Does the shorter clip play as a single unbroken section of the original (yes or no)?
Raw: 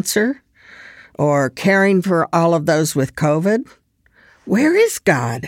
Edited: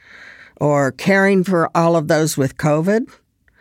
yes